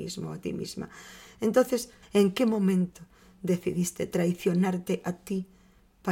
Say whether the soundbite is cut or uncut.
cut